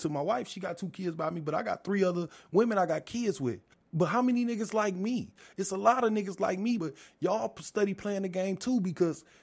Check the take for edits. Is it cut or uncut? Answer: cut